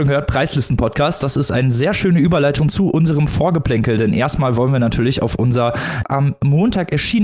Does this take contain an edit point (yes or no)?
no